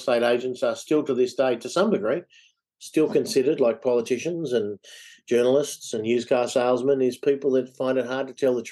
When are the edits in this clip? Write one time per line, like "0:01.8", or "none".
none